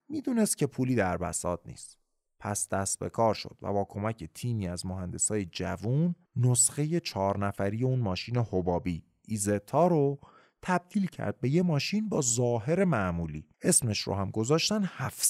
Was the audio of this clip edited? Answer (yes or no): yes